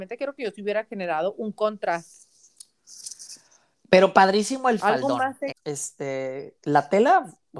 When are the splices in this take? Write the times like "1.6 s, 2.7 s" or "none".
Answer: 5.5 s